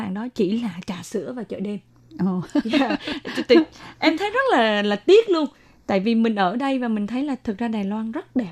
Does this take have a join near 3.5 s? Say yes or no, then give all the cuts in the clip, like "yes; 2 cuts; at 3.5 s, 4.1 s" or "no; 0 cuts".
no; 0 cuts